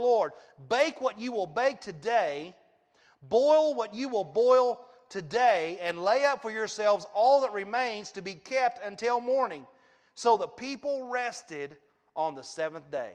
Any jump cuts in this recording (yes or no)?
no